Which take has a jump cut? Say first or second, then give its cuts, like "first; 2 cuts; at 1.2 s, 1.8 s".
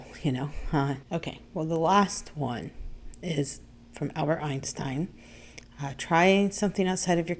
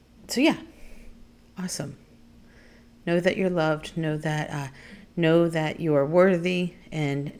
first; 2 cuts; at 1.0 s, 5.6 s